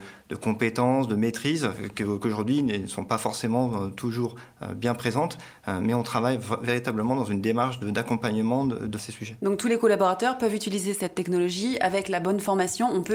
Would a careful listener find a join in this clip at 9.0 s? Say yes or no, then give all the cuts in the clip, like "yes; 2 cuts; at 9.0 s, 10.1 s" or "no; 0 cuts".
yes; 1 cut; at 9.0 s